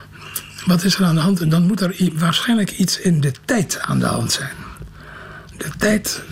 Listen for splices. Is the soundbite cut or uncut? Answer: uncut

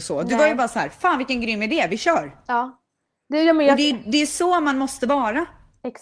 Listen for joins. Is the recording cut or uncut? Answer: uncut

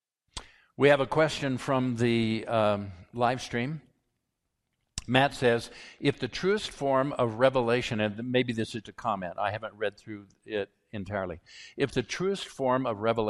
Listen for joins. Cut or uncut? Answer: cut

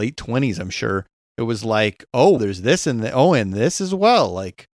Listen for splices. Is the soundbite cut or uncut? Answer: cut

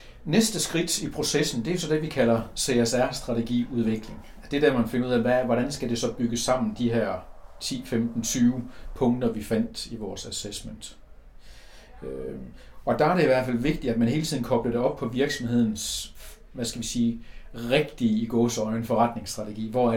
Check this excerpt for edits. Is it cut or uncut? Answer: uncut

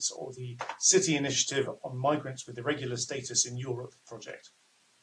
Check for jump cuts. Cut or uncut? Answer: uncut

